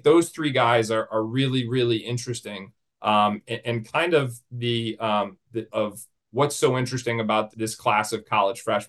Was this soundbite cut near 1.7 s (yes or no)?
no